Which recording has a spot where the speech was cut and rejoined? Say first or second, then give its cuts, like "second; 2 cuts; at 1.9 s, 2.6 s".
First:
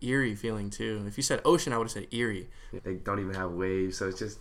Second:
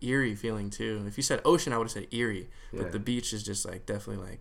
first; 1 cut; at 2.8 s